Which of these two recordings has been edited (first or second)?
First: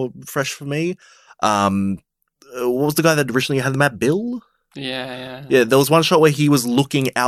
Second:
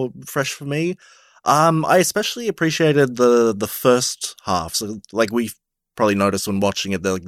first